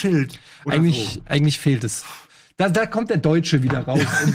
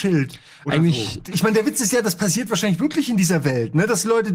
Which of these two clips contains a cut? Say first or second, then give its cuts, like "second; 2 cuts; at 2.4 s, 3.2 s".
second; 1 cut; at 1.2 s